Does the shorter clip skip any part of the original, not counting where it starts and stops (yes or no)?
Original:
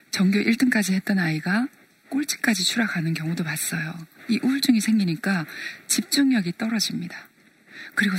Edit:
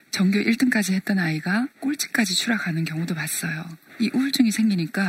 yes